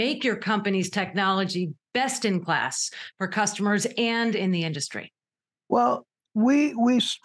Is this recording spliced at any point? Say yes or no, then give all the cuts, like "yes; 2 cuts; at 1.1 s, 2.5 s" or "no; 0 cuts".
no; 0 cuts